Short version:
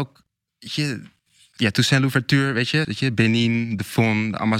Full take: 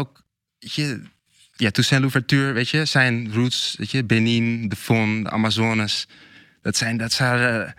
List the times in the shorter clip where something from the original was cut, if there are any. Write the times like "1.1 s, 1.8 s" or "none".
2.8 s